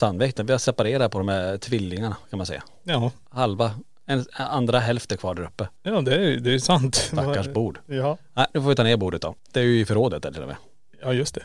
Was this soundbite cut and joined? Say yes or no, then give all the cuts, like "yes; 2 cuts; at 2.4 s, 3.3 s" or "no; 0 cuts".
yes; 1 cut; at 9.4 s